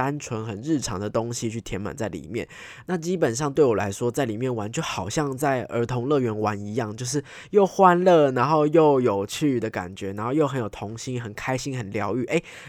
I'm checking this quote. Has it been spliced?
no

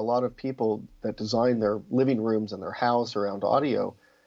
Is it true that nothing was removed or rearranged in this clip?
yes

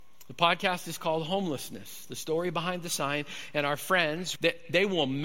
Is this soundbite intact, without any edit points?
no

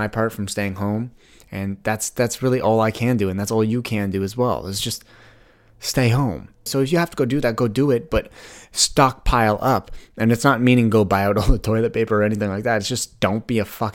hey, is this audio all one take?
no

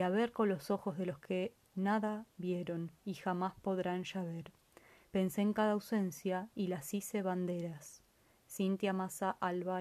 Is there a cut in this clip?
no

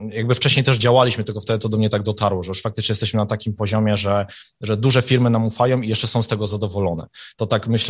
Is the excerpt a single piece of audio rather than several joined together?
yes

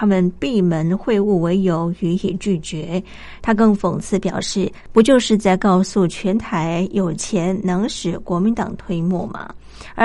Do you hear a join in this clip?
yes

